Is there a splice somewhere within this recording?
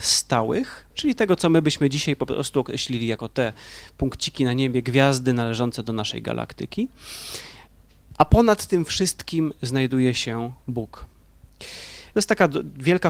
yes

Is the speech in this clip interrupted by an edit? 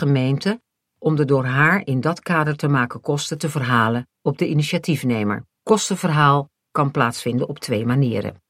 yes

